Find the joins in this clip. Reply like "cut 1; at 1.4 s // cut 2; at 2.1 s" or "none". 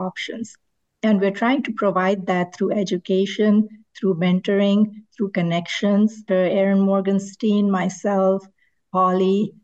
cut 1; at 6.3 s